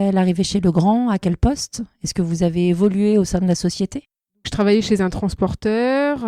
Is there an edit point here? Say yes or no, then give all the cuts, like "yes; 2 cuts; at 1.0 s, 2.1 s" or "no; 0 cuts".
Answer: no; 0 cuts